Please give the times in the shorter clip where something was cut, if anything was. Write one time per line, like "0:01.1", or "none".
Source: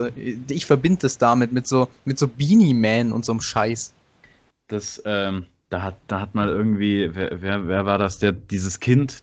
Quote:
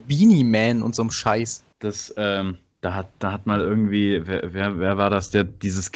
0:01.7